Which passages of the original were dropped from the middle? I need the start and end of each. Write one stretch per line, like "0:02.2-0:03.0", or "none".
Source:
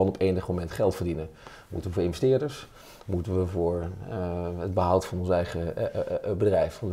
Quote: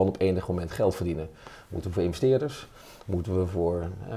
none